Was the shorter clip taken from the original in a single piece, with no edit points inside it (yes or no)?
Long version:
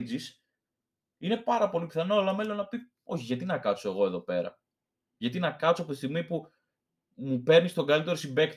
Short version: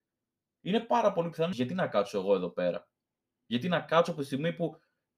no